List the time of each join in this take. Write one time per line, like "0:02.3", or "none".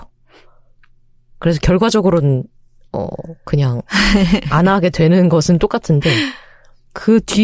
none